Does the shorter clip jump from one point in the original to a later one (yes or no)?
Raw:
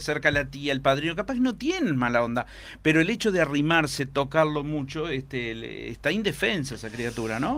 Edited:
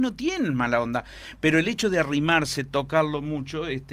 no